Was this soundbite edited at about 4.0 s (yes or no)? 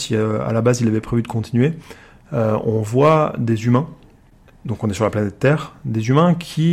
no